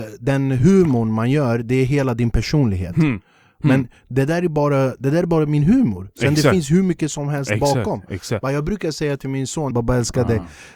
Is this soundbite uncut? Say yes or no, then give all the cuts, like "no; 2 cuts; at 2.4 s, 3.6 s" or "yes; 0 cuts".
no; 1 cut; at 9.7 s